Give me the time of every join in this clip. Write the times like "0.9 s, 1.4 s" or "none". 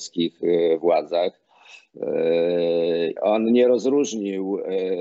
3.2 s